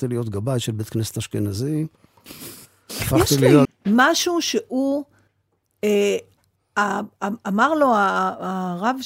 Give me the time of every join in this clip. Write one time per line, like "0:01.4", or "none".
0:03.7